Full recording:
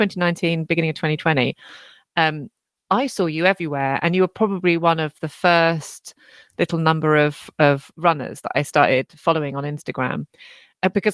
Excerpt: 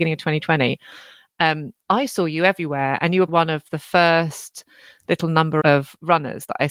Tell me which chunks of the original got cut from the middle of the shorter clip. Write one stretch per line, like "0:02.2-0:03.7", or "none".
0:02.6-0:02.8
0:04.3-0:04.8
0:07.1-0:07.6